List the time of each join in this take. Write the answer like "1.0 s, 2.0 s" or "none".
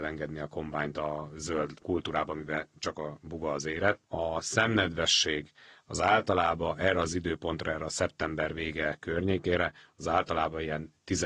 none